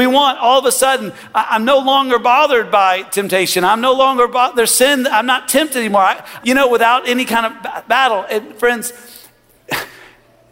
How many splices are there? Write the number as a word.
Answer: one